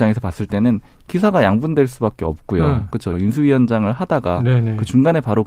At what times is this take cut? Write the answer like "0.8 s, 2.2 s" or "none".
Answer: 3.1 s

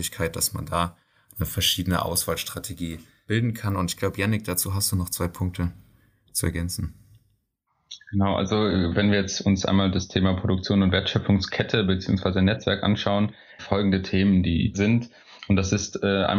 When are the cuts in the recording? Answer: 3.3 s, 13.6 s, 14.7 s

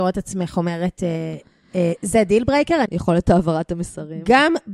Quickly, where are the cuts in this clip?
2.9 s

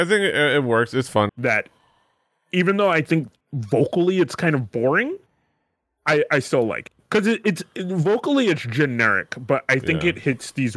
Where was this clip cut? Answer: 1.3 s, 3.4 s

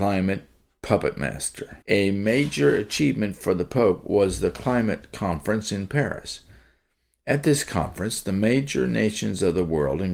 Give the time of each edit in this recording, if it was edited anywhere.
1.8 s

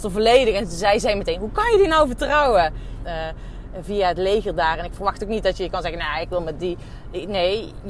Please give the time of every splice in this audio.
3.0 s

